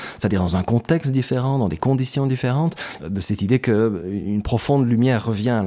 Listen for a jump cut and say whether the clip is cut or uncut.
cut